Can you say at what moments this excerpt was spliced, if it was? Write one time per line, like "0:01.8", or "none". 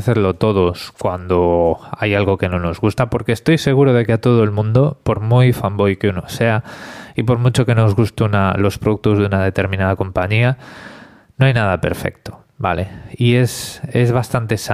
none

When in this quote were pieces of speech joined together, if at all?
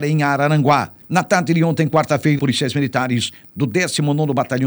0:01.0
0:02.4

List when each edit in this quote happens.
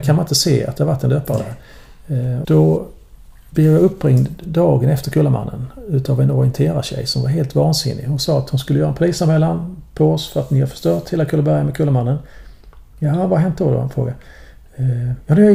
0:02.4

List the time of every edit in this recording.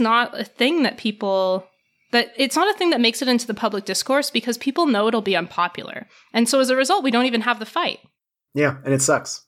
none

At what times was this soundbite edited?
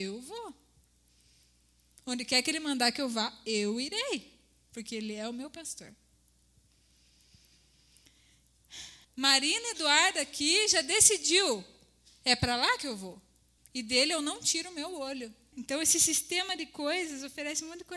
0:09.0
0:13.6
0:15.5

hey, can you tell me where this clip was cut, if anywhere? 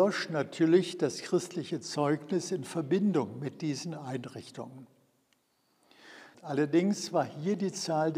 0:06.3

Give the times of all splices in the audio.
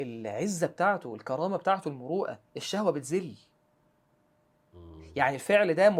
0:02.5

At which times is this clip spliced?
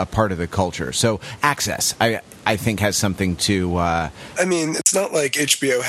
0:04.3

